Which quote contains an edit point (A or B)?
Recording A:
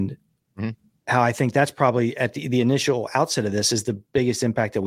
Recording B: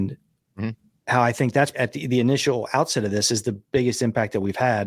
B